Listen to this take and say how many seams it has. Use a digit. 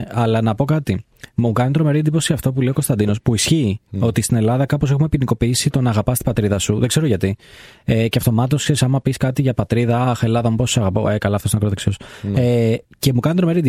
0